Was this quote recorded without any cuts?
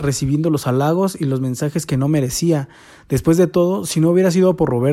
yes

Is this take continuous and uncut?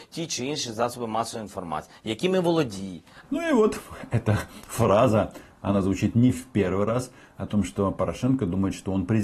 no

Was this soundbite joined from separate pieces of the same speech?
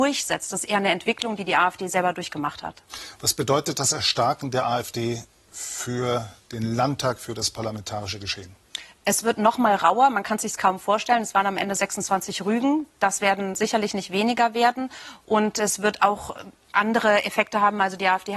no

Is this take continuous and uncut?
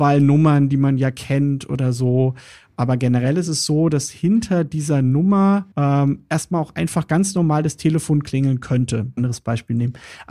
no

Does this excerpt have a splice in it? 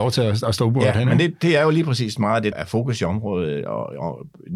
yes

